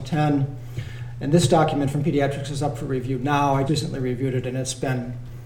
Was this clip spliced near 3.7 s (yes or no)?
yes